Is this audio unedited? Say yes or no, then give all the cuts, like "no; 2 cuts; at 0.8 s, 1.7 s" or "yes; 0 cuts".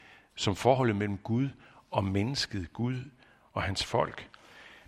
yes; 0 cuts